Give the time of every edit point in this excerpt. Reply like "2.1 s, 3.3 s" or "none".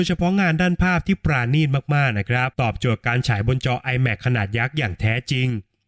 2.5 s